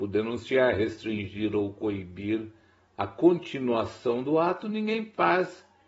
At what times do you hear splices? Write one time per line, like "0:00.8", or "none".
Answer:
none